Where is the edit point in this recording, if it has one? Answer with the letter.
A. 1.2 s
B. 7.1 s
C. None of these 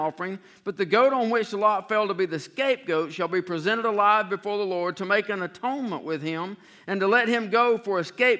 C